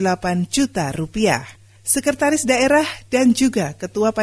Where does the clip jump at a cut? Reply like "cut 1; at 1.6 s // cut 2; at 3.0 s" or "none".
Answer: cut 1; at 1.8 s